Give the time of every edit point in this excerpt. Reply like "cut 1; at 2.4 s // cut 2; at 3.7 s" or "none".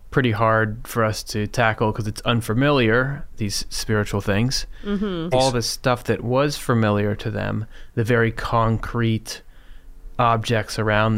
cut 1; at 5.3 s